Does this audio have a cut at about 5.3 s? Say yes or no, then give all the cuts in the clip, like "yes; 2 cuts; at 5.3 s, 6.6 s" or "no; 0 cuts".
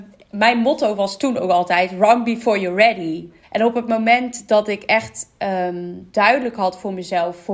no; 1 cut; at 3.4 s